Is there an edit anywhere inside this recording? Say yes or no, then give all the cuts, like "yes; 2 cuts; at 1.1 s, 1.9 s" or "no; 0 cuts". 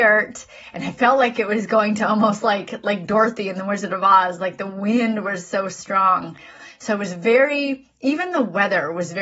no; 0 cuts